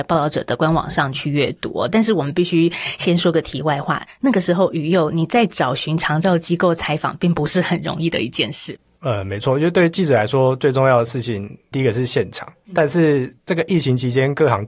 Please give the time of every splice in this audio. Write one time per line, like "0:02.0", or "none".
none